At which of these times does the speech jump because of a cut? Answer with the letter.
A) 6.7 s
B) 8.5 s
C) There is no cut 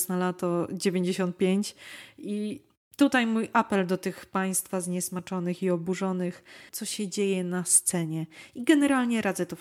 A